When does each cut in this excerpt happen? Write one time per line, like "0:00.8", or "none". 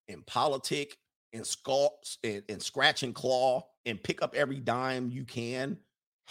0:02.4
0:03.7